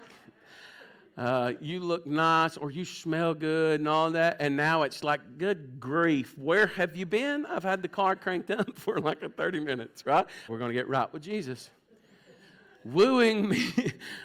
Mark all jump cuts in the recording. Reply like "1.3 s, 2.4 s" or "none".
10.5 s